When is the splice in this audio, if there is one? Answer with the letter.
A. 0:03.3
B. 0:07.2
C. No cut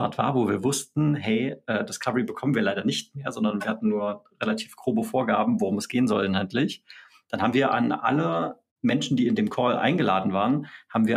C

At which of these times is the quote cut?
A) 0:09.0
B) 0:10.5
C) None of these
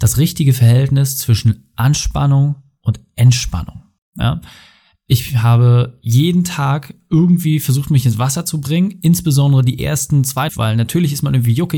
B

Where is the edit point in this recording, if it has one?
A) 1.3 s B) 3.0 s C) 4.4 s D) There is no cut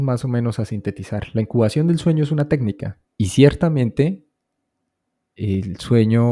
B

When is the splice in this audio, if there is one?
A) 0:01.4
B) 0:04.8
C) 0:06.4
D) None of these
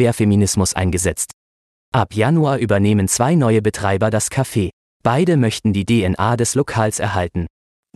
D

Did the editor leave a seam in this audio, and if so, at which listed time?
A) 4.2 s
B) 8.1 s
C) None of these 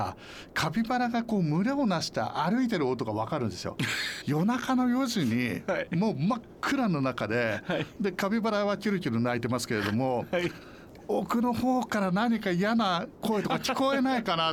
A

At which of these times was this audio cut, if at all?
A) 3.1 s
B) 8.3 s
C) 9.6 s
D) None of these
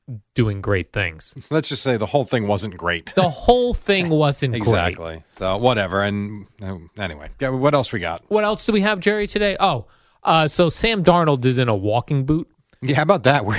D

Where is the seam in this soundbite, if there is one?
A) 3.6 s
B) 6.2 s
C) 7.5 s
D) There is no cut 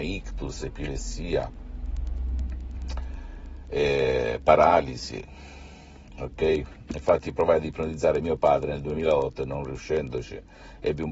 D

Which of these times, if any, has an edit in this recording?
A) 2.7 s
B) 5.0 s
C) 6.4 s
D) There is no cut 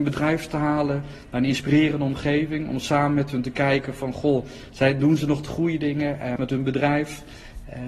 C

